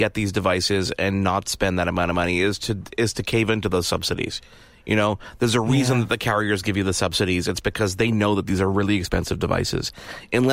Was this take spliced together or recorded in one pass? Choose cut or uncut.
uncut